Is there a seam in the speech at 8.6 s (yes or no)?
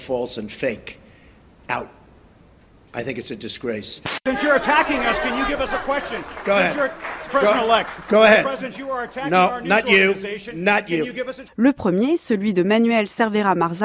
yes